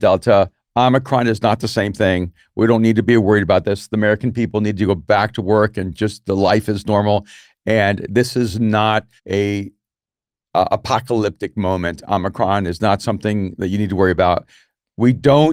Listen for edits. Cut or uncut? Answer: cut